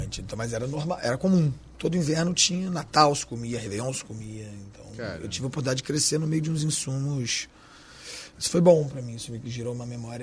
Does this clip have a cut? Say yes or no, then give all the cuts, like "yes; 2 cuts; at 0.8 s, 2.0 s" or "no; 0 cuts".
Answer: no; 0 cuts